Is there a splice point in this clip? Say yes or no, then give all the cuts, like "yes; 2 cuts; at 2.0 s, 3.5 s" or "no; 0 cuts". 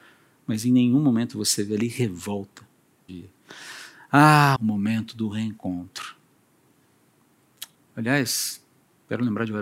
yes; 3 cuts; at 3.1 s, 4.6 s, 7.7 s